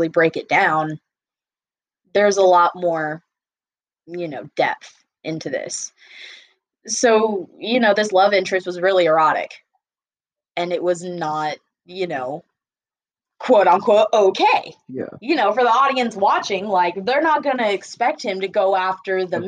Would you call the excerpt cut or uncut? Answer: uncut